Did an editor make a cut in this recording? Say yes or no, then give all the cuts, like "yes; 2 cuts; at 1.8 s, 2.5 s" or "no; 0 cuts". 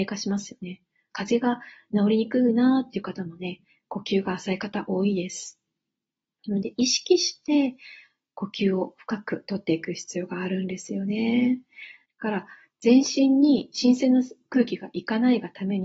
yes; 2 cuts; at 1.1 s, 12.1 s